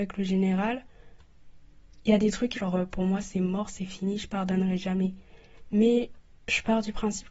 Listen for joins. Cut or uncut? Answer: cut